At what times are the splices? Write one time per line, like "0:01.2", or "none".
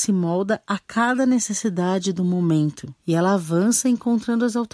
0:03.0